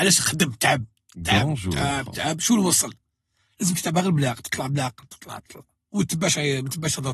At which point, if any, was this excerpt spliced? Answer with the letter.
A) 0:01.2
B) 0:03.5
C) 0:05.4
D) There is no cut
C